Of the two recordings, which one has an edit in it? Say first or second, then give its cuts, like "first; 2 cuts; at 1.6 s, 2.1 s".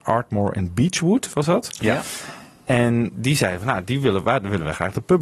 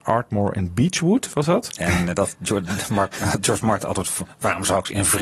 second; 1 cut; at 1.8 s